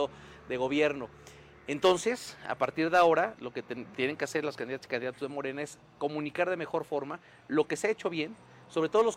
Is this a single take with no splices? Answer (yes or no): yes